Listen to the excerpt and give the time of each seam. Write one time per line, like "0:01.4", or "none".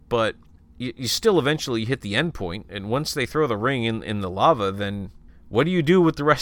none